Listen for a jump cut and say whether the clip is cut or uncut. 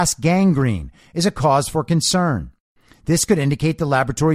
uncut